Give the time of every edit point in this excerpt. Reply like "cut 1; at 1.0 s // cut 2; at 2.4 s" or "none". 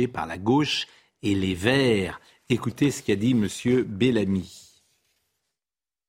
none